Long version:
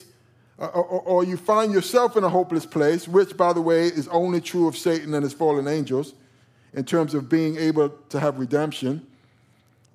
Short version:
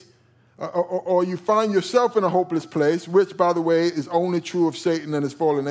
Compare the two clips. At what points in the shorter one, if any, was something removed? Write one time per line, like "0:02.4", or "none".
none